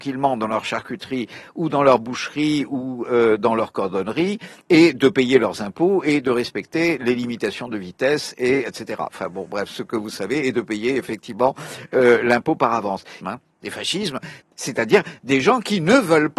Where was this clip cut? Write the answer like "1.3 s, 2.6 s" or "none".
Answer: 13.2 s, 14.4 s